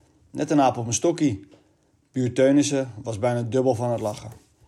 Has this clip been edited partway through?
no; 0 cuts

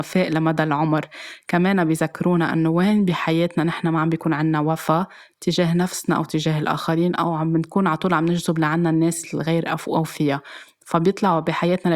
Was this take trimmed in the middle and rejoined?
no; 0 cuts

